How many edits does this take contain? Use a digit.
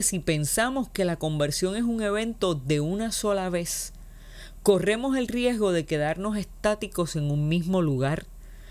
0